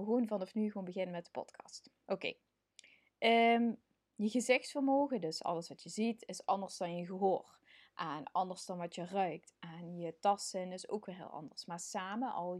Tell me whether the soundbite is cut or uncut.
uncut